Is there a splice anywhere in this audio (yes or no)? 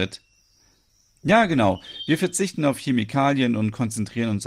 yes